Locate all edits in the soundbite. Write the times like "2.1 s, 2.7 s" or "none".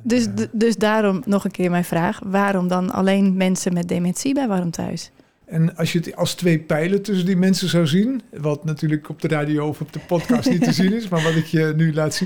5.4 s